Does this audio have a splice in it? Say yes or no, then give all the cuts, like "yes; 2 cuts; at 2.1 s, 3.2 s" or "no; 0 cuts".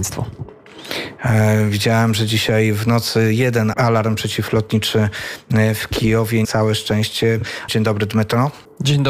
yes; 3 cuts; at 3.7 s, 6.4 s, 7.7 s